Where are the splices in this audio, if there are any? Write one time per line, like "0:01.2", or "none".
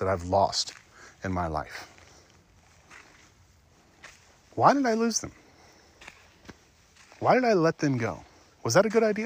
none